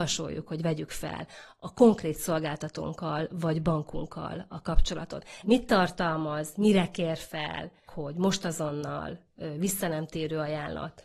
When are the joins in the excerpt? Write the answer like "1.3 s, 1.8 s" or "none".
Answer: 5.4 s, 7.9 s